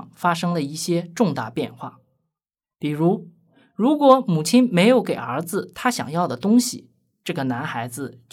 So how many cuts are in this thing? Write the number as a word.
zero